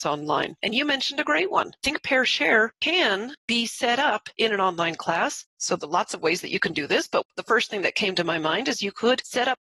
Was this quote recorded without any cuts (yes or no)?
yes